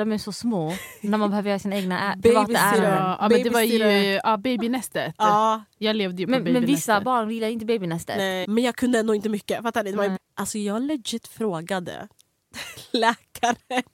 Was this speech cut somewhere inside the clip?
yes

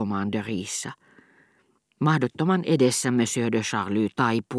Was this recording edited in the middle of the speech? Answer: no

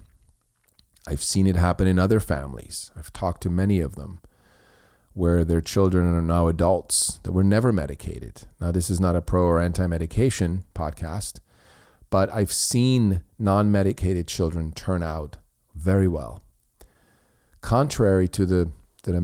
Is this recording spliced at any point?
no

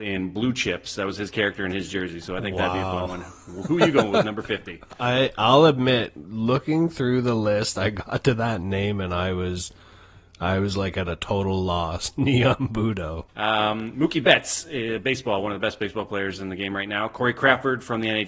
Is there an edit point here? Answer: yes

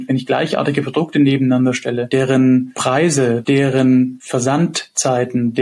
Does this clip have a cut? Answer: yes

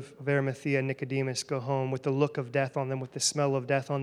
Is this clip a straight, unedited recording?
yes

